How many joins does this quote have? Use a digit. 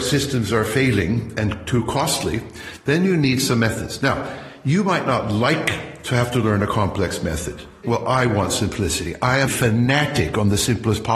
2